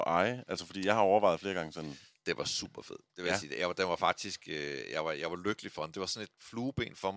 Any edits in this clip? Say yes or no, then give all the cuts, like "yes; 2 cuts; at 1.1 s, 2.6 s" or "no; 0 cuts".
no; 0 cuts